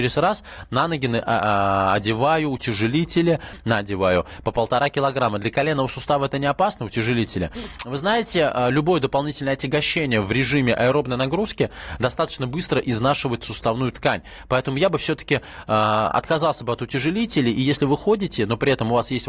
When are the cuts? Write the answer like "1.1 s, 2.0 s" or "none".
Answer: none